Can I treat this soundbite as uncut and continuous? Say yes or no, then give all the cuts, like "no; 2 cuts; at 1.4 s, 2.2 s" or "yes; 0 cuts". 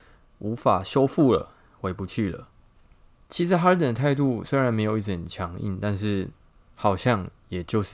no; 1 cut; at 3.2 s